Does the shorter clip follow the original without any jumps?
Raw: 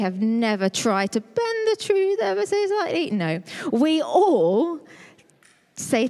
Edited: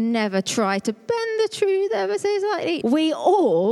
no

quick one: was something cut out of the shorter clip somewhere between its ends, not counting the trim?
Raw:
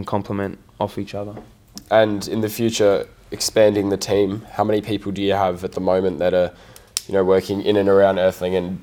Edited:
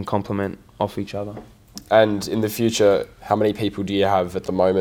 yes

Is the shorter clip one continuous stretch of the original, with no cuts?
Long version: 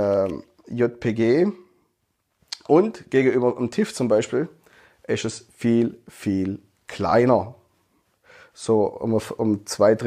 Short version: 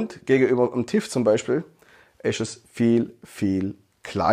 yes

